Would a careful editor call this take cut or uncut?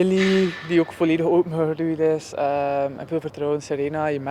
uncut